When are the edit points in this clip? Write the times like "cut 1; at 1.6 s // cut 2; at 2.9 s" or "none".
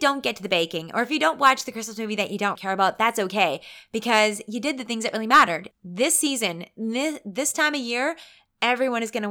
cut 1; at 2.6 s // cut 2; at 5.7 s

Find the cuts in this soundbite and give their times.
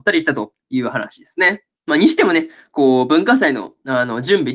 cut 1; at 1.7 s

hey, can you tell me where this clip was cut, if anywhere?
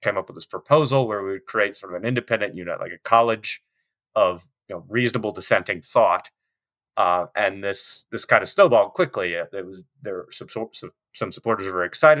none

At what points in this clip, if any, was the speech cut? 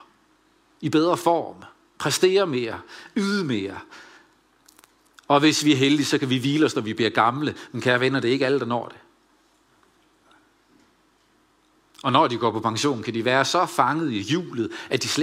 none

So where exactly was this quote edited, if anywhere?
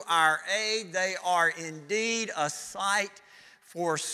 none

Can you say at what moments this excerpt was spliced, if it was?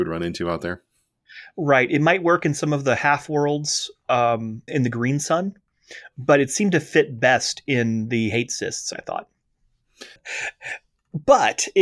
cut 1; at 4.7 s // cut 2; at 10.2 s

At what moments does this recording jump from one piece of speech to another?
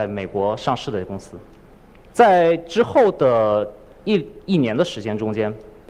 cut 1; at 2.1 s

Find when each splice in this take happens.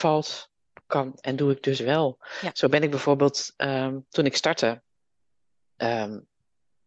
none

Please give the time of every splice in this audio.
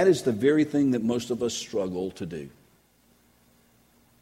none

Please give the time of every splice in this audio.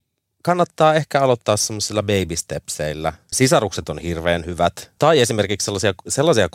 cut 1; at 3.3 s // cut 2; at 5.0 s

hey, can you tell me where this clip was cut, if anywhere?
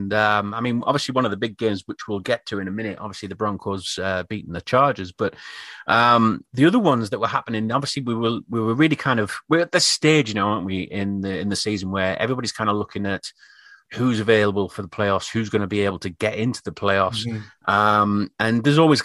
none

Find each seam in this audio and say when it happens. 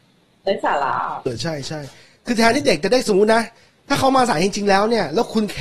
cut 1; at 1.3 s

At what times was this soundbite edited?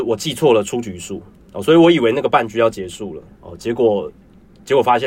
cut 1; at 3.3 s

